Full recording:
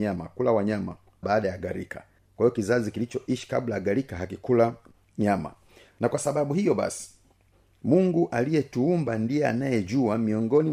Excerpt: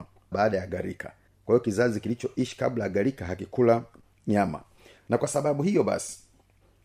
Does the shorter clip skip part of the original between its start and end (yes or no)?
no